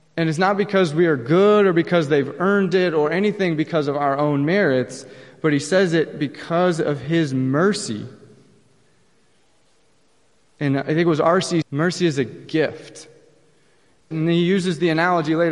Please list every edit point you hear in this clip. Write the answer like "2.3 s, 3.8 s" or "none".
11.6 s, 14.1 s